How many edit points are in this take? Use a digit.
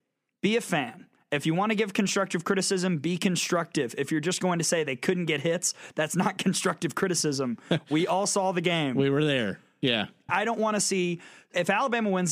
1